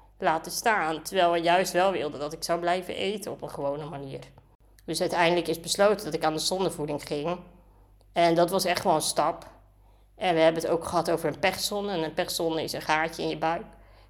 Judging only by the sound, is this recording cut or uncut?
uncut